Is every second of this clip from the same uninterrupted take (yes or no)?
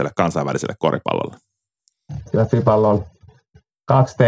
no